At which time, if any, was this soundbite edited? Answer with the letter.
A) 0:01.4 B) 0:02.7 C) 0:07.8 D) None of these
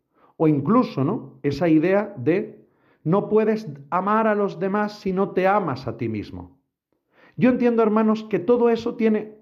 D